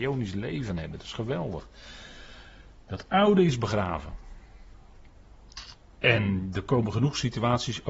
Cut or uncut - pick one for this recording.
uncut